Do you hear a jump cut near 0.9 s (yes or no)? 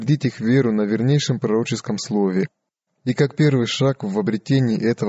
no